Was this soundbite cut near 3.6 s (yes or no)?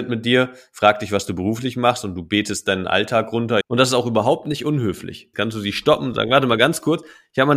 yes